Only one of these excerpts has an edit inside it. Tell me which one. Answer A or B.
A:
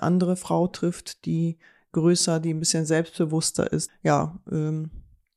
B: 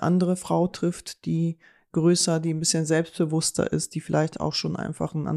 A